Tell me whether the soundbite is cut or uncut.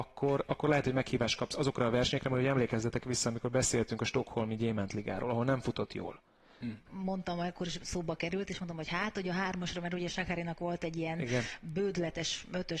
cut